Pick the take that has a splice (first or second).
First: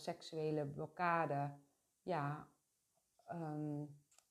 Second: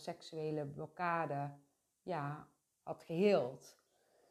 second